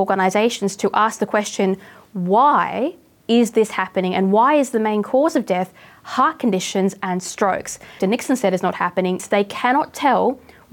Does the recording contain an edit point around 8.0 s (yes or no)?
yes